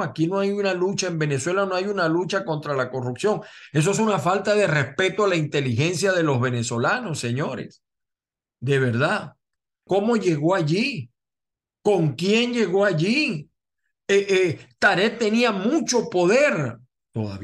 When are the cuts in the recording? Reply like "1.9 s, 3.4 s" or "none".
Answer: 9.9 s